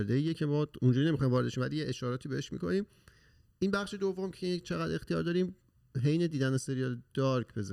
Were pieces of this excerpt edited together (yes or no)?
no